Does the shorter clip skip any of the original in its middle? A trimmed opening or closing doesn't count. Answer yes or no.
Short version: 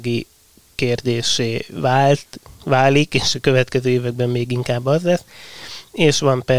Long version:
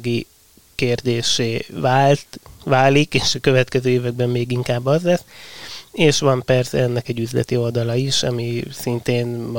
no